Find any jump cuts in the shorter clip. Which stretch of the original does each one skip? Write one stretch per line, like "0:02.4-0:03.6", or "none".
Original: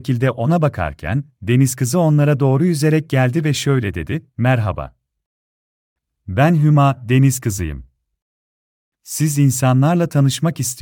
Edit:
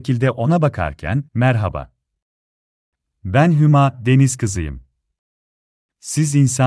0:01.3-0:04.3